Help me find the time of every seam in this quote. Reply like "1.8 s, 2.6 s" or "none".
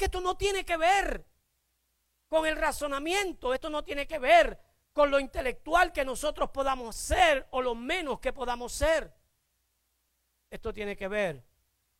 none